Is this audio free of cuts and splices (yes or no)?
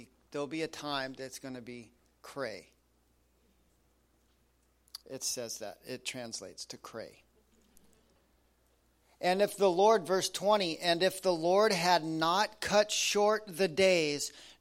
no